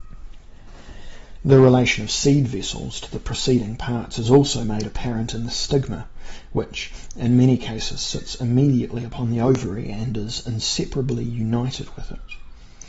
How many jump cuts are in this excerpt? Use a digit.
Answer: 0